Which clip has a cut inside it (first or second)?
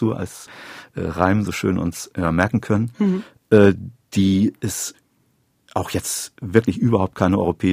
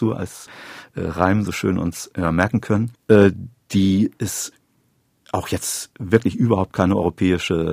second